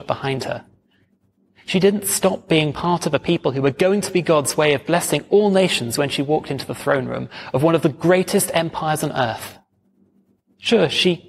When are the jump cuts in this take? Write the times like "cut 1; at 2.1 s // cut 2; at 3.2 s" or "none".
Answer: none